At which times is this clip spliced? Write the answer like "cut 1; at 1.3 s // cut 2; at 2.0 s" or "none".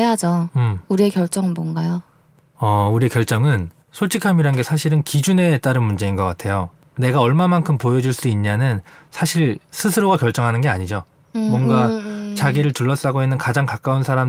cut 1; at 3.8 s